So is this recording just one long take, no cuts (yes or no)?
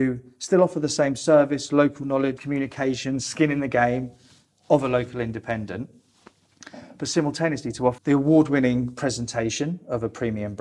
no